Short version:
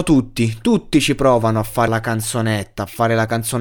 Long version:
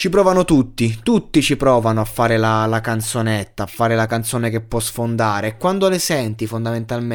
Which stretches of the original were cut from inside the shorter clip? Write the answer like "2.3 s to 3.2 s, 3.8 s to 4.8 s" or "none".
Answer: 2.3 s to 2.7 s

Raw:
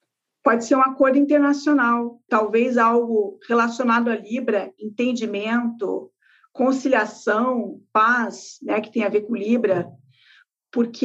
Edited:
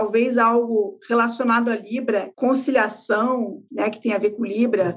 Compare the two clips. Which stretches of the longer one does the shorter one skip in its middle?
4.7 s to 6.5 s, 7.9 s to 8.6 s

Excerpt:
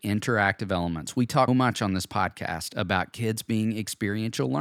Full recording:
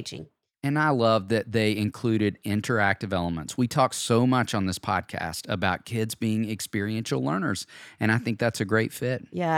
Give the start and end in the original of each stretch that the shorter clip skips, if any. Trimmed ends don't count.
3.9 s to 4.2 s

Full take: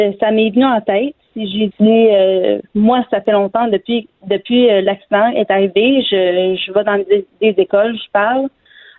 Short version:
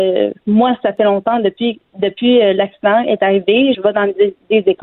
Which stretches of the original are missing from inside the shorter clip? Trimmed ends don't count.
6.0 s to 6.7 s

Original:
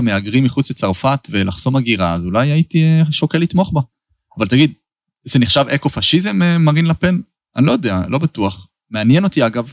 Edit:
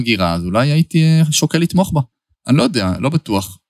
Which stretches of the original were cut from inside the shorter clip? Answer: 4.1 s to 7.4 s

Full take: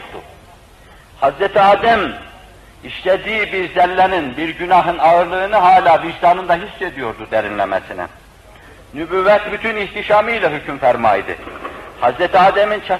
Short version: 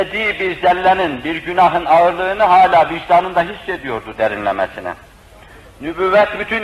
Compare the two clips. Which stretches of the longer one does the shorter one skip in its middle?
none

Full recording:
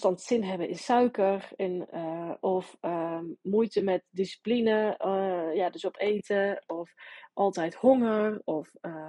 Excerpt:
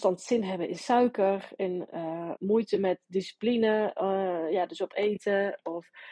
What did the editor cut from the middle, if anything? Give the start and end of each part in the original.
2.4 s to 3.4 s

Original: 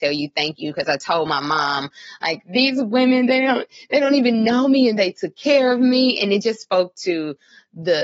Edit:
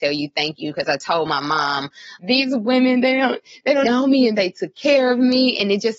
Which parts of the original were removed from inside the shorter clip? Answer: 2.2 s to 2.4 s, 4.1 s to 4.4 s

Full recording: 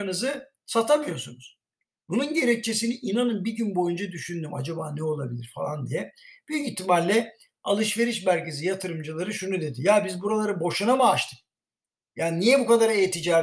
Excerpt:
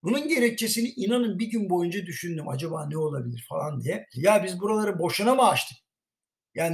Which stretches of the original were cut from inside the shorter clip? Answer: 6.2 s to 9.7 s

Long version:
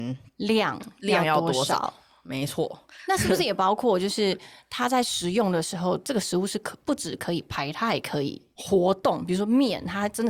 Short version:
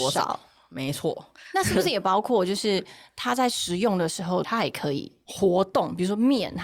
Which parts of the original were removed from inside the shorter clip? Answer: 6.0 s to 7.7 s

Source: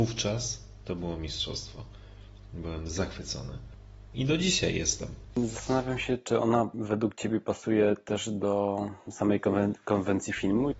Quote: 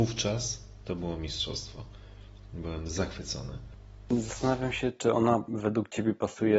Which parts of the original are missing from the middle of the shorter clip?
4.1 s to 5.3 s

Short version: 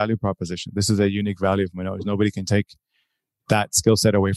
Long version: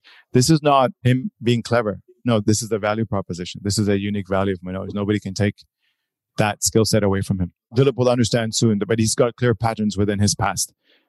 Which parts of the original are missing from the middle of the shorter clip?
none

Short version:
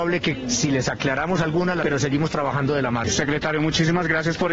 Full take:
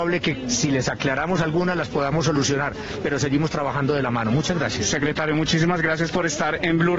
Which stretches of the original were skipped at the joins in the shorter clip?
1.8 s to 3.0 s, 4.2 s to 4.8 s

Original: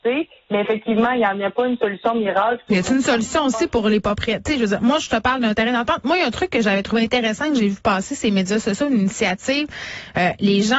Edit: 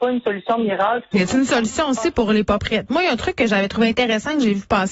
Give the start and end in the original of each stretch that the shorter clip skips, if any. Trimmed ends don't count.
4.4 s to 6.0 s

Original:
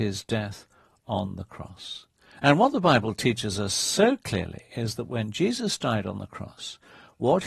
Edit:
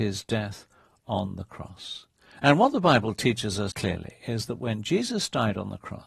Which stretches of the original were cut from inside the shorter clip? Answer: 3.7 s to 4.2 s

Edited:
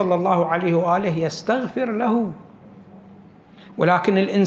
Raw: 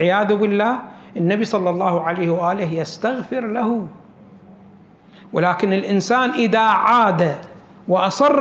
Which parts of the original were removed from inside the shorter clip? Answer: none

